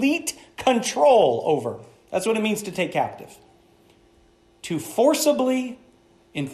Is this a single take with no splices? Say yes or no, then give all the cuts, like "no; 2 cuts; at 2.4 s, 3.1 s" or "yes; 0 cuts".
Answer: yes; 0 cuts